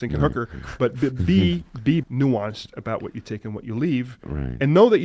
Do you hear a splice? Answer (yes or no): yes